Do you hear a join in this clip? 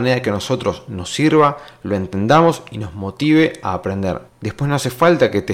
yes; 1 cut; at 4.3 s

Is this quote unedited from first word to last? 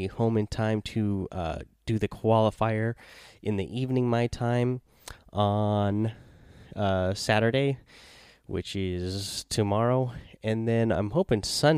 yes; 0 cuts

